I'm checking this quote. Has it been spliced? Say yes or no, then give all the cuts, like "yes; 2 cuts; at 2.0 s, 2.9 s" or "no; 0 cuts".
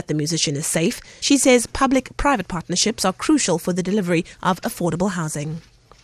yes; 1 cut; at 1.2 s